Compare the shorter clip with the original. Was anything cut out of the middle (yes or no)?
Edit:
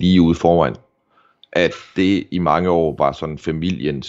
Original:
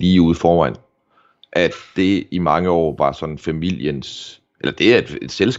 no